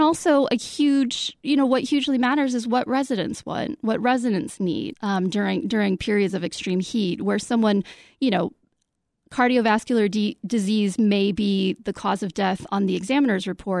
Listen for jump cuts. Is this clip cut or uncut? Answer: cut